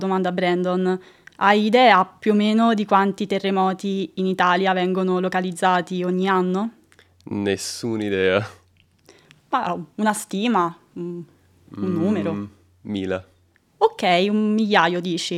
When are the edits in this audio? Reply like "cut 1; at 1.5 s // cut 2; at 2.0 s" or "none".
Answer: none